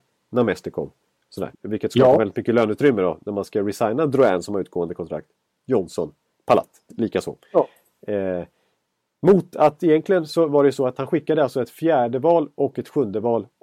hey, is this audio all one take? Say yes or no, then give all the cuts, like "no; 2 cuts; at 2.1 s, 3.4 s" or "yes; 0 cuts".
no; 1 cut; at 1.5 s